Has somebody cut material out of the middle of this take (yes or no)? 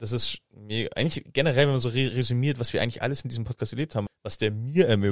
yes